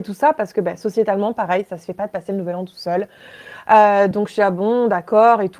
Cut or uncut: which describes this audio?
uncut